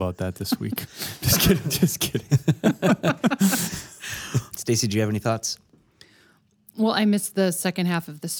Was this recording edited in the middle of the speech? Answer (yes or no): yes